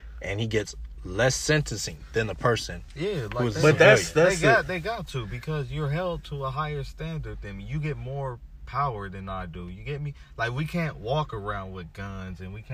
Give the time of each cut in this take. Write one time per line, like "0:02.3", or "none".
none

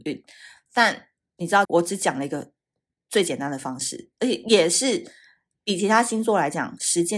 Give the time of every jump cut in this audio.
0:01.6

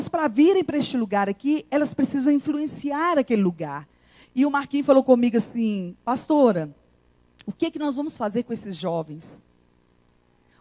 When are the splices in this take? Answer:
0:04.2

